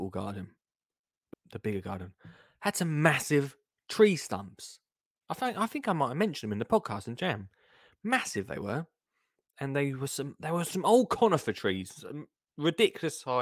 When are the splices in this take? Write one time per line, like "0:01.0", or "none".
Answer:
0:01.3

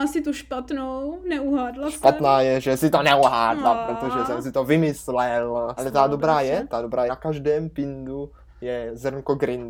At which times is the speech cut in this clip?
0:05.8
0:07.1

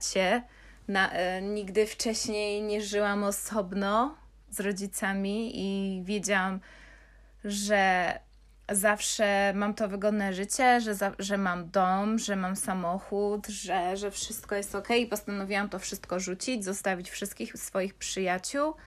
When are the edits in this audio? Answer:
none

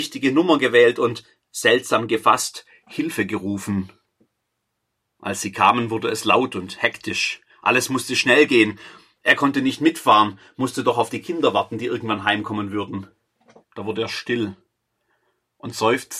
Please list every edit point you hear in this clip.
0:13.6

